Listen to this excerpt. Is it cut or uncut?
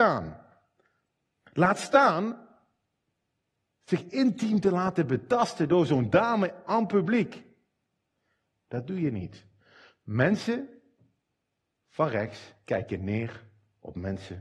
cut